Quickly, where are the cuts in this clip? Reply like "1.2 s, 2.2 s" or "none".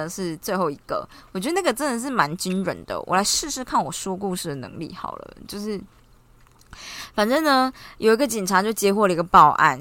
none

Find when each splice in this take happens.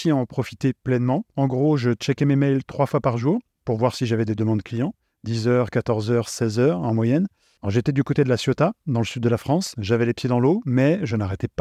7.6 s

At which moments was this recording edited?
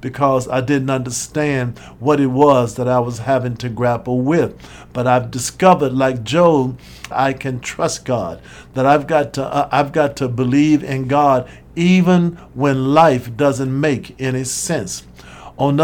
7.1 s

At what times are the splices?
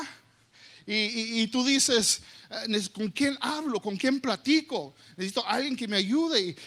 none

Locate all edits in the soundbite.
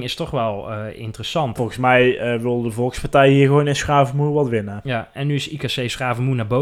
1.6 s

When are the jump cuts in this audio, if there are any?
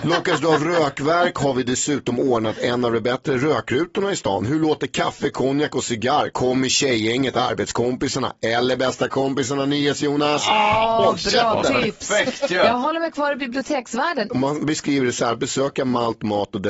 14.3 s

